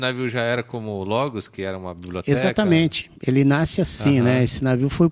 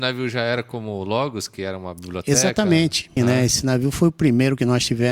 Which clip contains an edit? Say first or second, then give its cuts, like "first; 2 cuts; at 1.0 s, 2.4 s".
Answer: second; 1 cut; at 3.2 s